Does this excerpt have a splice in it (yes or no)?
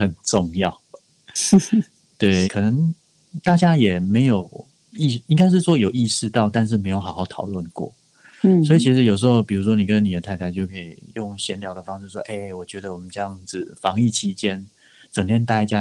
yes